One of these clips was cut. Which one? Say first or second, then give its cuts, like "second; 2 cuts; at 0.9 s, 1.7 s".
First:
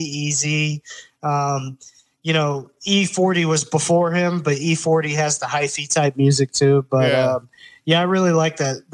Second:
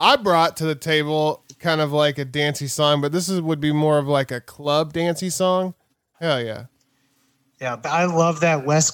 second; 2 cuts; at 6.1 s, 7.8 s